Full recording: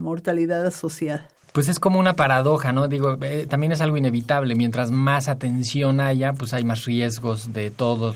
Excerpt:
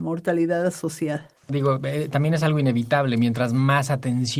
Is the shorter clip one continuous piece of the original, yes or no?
no